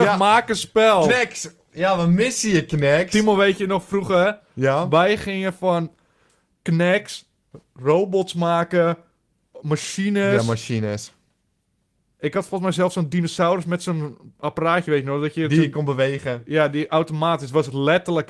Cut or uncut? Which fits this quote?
uncut